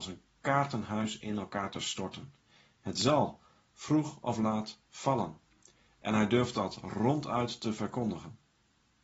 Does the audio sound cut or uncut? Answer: uncut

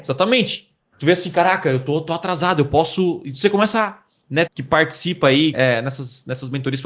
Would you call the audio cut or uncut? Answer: cut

